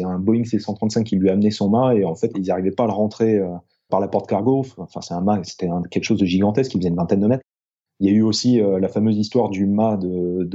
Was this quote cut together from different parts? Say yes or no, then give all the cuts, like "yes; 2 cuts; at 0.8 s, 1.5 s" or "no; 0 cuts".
yes; 3 cuts; at 2.3 s, 3.9 s, 7.9 s